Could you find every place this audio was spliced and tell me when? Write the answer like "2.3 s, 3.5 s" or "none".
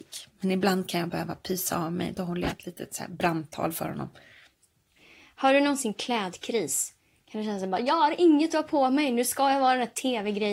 none